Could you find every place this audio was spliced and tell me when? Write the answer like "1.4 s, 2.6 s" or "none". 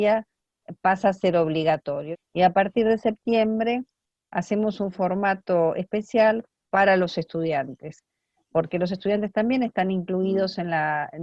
2.1 s